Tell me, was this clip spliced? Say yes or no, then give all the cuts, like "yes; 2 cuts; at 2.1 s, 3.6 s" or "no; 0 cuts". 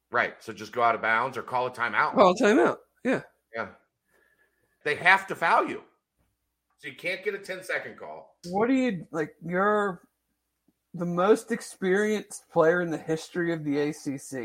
yes; 3 cuts; at 4.8 s, 6.7 s, 8.4 s